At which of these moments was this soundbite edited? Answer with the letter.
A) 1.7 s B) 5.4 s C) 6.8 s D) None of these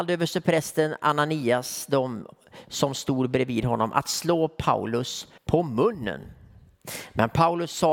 B